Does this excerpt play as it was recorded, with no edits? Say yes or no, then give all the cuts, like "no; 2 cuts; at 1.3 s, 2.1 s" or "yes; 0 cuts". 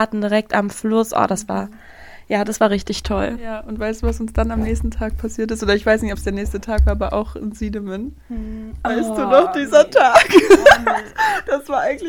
yes; 0 cuts